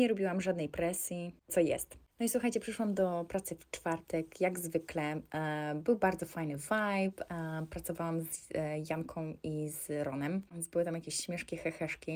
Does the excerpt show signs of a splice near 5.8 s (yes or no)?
no